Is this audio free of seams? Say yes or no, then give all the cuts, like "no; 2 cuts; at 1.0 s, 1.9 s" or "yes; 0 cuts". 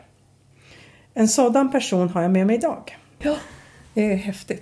no; 1 cut; at 3.2 s